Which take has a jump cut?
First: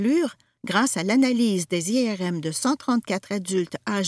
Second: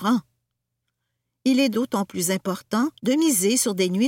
second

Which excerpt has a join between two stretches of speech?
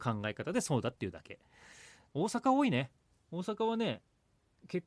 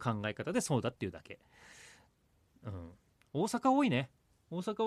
first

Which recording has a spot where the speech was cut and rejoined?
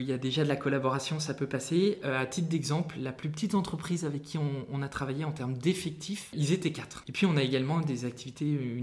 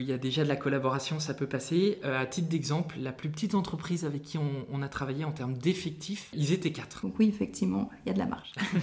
first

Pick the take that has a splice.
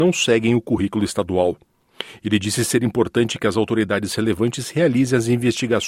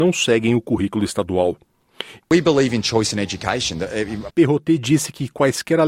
second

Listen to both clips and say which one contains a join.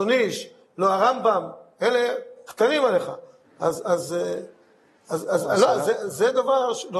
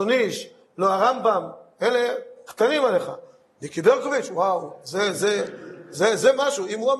first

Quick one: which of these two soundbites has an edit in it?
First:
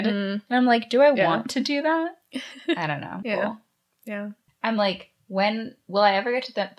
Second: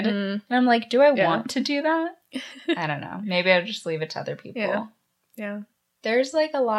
first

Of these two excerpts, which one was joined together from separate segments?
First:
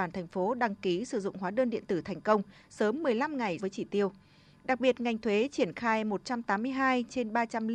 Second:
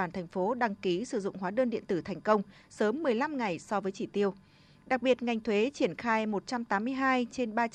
first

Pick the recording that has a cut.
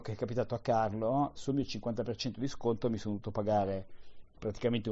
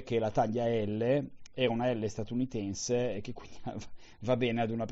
first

